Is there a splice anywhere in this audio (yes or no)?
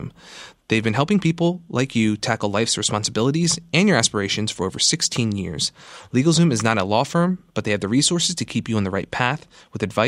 no